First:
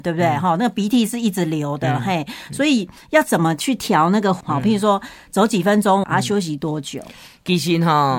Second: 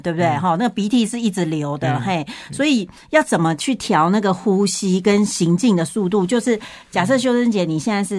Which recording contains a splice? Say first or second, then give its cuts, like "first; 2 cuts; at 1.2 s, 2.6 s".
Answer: first; 2 cuts; at 4.4 s, 6.0 s